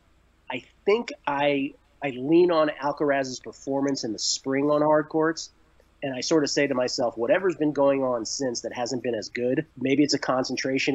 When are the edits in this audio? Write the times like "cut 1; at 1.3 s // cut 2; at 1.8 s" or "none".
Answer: cut 1; at 9.7 s